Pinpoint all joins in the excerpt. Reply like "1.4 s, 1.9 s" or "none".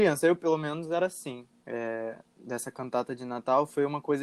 1.6 s